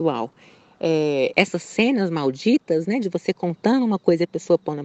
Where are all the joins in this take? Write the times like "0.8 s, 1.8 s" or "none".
1.3 s